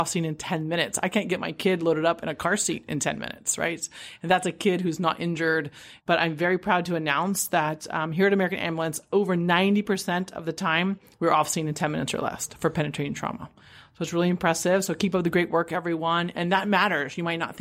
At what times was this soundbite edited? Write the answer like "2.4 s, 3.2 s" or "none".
6.0 s

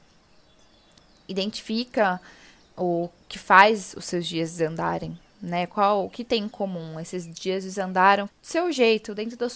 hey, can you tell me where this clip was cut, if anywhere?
8.3 s

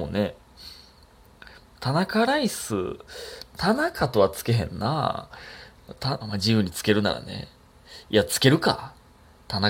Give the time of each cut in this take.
6.2 s

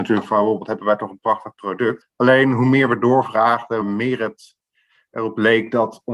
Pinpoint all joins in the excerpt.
2.0 s, 3.8 s

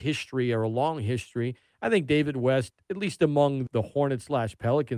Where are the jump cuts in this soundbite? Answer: 3.7 s

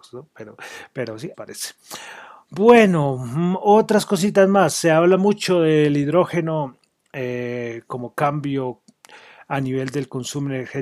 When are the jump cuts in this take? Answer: 1.3 s

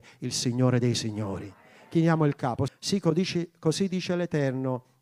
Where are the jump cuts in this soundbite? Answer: 2.7 s

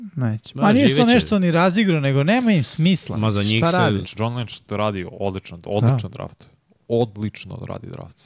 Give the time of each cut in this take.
4.0 s

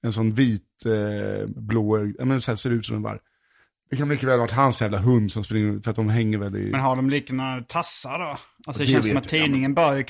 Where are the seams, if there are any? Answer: none

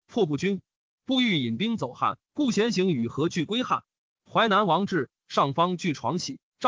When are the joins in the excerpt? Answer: 2.2 s

